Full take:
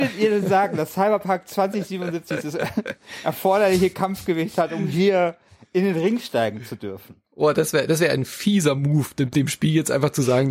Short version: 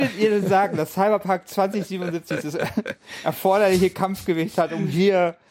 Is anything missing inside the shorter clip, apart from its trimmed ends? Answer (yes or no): no